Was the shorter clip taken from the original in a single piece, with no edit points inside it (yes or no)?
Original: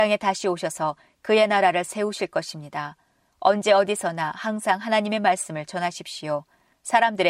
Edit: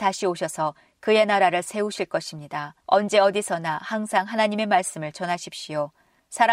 no